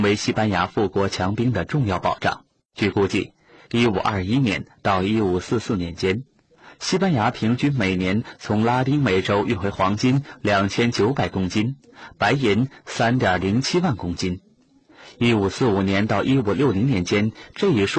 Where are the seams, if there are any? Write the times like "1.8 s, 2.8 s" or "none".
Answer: none